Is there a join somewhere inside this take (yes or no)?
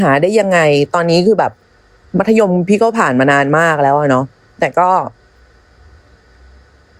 no